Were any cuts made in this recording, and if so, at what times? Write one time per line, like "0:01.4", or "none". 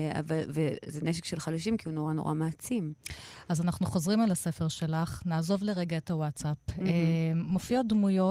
none